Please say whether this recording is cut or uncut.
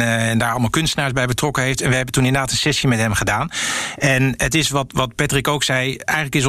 uncut